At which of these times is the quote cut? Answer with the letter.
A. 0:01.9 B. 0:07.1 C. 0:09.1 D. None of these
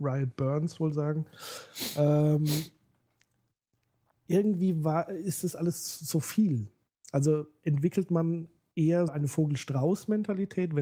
C